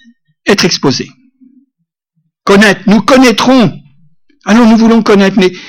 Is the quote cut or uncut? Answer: uncut